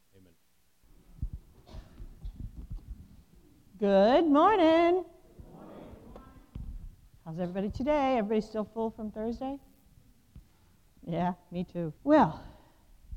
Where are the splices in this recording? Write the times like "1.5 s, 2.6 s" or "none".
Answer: 12.0 s